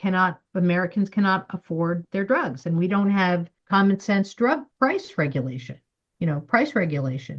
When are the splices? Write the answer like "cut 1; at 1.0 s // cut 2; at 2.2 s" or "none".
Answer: cut 1; at 3.6 s // cut 2; at 4.7 s